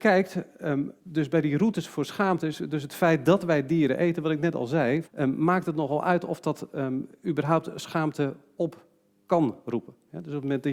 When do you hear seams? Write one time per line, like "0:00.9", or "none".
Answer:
0:01.0
0:05.0